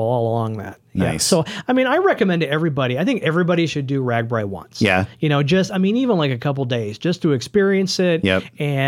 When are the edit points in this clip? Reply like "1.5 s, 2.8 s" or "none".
none